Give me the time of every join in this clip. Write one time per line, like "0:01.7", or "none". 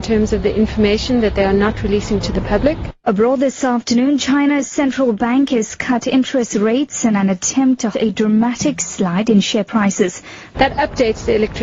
0:03.0
0:07.9
0:10.5